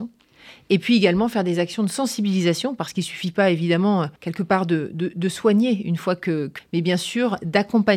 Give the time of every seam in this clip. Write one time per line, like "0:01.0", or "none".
0:04.2
0:06.6